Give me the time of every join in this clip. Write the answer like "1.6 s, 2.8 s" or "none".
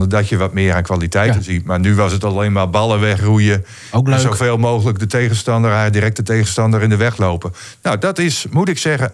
none